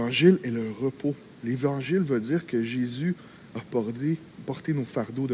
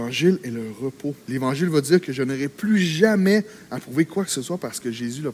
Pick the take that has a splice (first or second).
second